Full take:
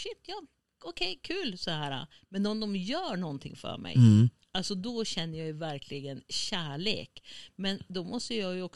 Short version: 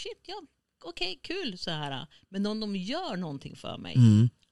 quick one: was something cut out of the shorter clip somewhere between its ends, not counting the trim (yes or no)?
no